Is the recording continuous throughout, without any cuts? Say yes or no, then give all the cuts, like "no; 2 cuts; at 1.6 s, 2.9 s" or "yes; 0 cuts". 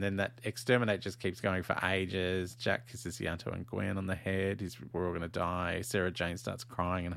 no; 1 cut; at 4.9 s